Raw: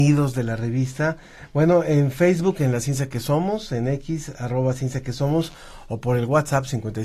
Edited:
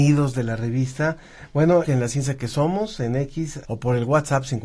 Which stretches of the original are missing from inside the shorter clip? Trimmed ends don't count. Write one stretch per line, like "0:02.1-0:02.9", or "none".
0:01.8-0:02.6
0:04.4-0:05.9